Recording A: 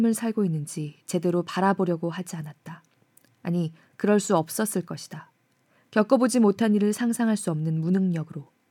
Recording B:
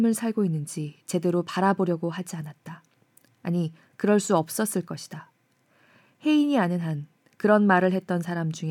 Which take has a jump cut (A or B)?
A